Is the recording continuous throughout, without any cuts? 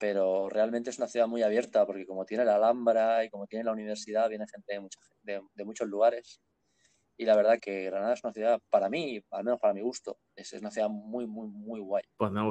no; 1 cut; at 7.6 s

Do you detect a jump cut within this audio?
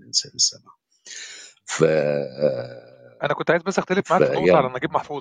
no; 0 cuts

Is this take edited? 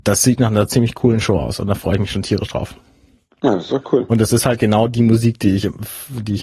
no; 0 cuts

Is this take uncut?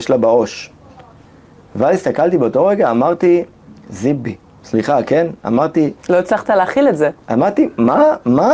no; 1 cut; at 7.2 s

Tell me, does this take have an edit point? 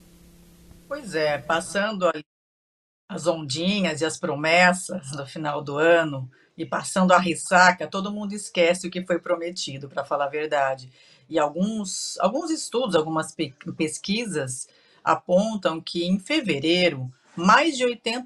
no; 0 cuts

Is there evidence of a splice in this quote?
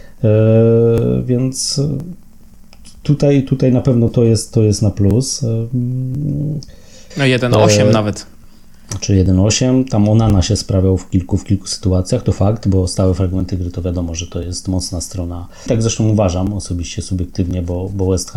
yes; 2 cuts; at 7.1 s, 15.7 s

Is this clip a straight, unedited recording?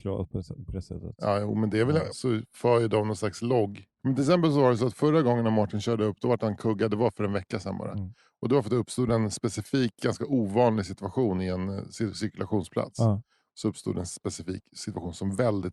no; 2 cuts; at 2.1 s, 4.0 s

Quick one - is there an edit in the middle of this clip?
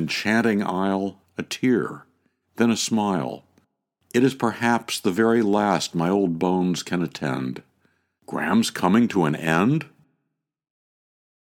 yes; 2 cuts; at 1.2 s, 8.2 s

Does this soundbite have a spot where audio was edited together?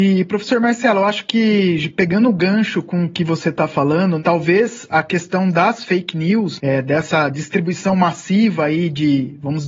no; 0 cuts

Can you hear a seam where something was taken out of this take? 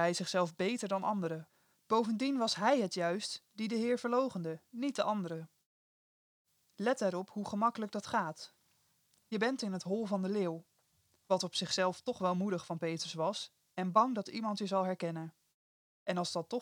no; 0 cuts

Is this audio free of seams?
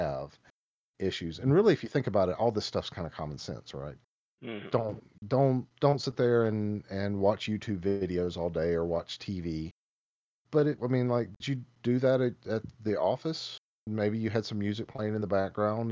no; 1 cut; at 10.8 s

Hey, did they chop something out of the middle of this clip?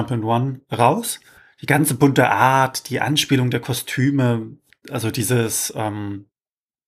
no; 0 cuts

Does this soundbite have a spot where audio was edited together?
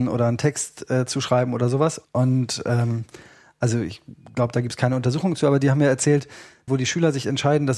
yes; 2 cuts; at 2.0 s, 6.7 s

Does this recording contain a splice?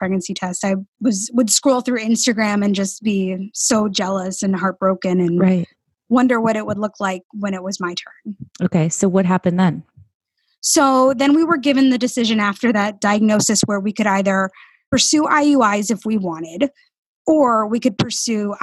no; 0 cuts

